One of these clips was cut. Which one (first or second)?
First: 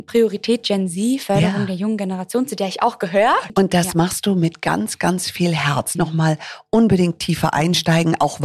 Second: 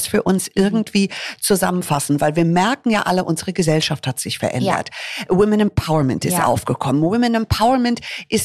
first